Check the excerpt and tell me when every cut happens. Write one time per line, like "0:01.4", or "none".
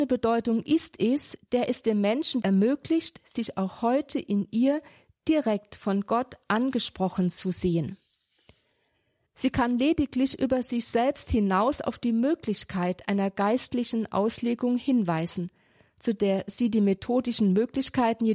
0:02.4
0:09.3